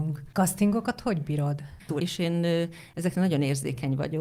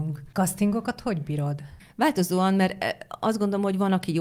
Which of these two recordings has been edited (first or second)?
first